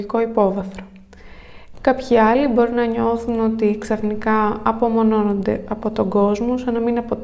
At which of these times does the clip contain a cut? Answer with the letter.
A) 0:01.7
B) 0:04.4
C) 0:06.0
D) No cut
A